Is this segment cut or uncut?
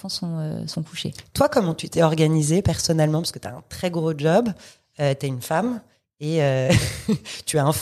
uncut